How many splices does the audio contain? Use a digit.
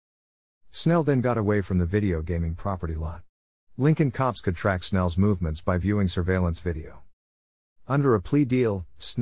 0